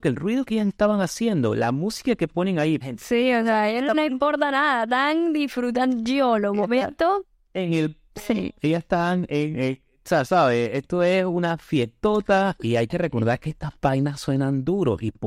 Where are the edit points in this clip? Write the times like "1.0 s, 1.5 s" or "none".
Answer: 2.8 s